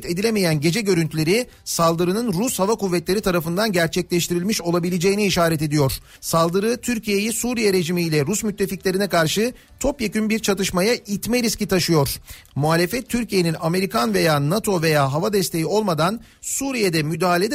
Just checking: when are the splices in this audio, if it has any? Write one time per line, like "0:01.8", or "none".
0:06.2
0:12.5